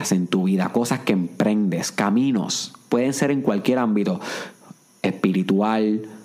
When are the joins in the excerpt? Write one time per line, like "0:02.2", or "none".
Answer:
none